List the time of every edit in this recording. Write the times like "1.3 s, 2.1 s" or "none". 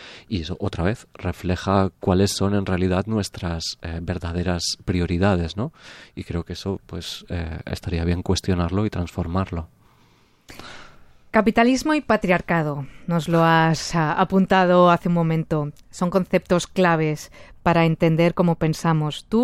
1.9 s